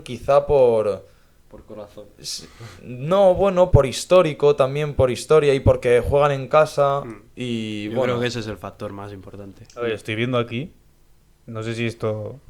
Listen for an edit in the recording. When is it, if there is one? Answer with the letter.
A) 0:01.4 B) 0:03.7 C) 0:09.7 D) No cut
B